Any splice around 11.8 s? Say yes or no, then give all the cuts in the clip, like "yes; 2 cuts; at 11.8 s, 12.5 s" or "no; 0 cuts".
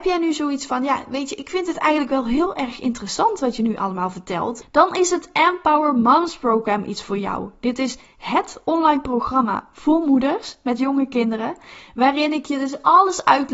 no; 1 cut; at 4.6 s